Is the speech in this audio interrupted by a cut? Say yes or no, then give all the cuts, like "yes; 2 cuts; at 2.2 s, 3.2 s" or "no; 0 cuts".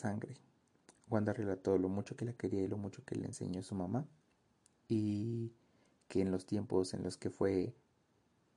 no; 0 cuts